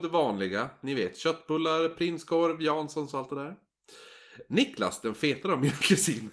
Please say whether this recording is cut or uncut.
uncut